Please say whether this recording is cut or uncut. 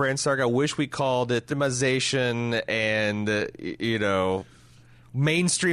cut